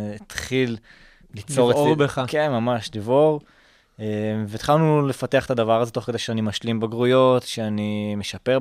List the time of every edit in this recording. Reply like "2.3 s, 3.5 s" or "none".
1.2 s

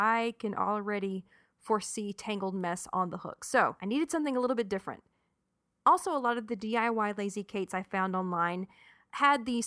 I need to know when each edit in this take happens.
none

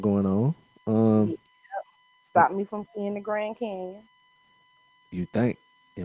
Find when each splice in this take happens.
none

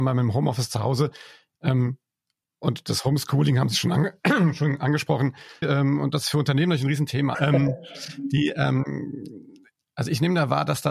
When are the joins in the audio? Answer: 5.6 s, 7.3 s

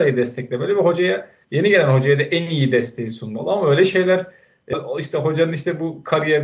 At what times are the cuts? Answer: 4.7 s

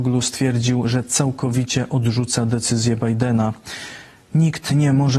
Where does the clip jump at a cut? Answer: none

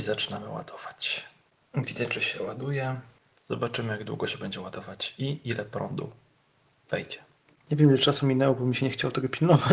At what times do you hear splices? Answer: none

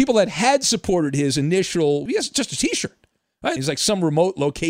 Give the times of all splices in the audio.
2.1 s, 3.6 s

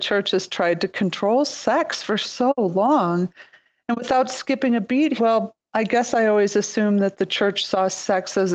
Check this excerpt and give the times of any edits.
5.2 s

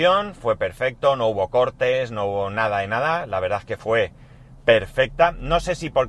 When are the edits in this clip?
none

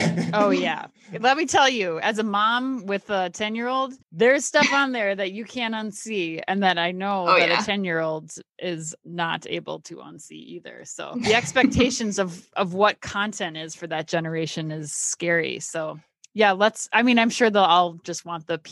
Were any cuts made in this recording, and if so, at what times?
4.0 s

